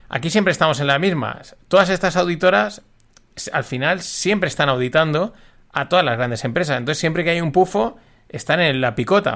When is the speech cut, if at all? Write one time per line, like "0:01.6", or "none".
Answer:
none